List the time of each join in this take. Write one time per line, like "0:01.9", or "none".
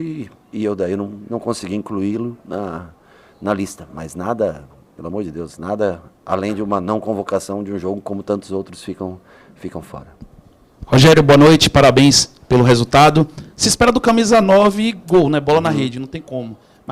none